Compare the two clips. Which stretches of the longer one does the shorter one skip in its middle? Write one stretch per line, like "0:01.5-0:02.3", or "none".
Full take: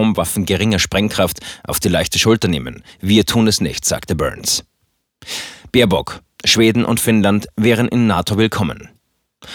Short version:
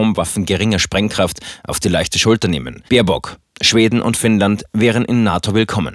0:02.9-0:05.7